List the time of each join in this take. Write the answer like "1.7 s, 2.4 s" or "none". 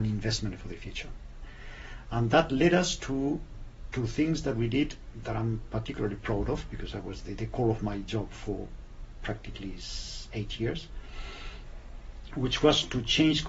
7.4 s

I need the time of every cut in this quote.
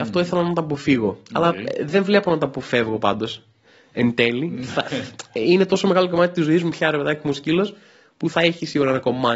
8.3 s

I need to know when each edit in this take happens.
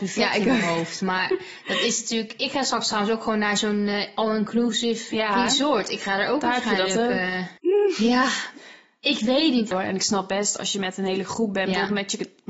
5.1 s, 7.6 s, 9.7 s

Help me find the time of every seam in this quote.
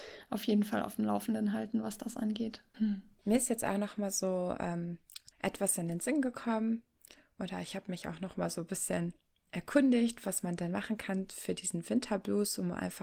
2.7 s, 5.3 s

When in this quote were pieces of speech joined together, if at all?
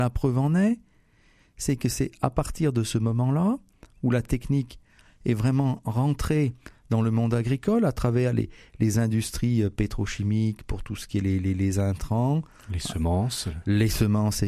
none

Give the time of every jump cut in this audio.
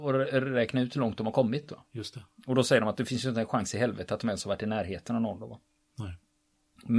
none

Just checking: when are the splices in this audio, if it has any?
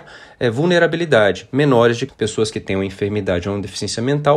2.1 s

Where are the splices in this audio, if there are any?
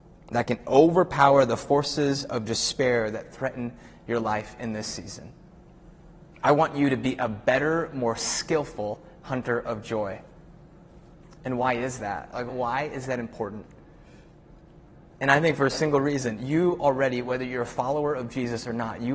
12.5 s

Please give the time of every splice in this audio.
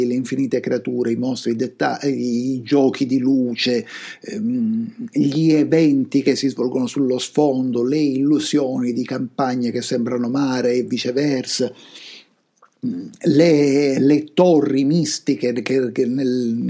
none

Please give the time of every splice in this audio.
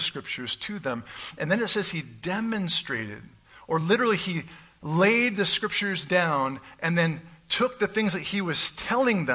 none

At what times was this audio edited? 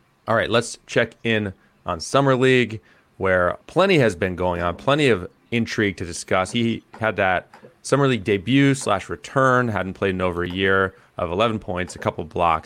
6.5 s

